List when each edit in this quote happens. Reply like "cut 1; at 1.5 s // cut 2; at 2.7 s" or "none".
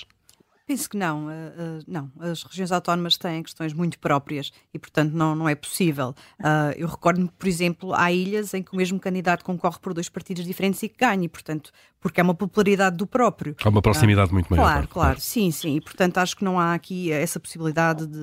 none